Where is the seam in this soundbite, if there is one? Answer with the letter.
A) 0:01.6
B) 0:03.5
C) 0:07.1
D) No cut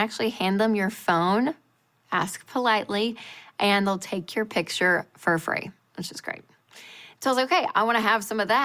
C